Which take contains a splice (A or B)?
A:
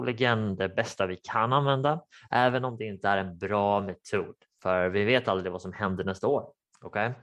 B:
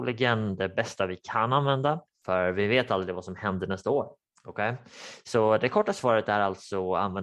B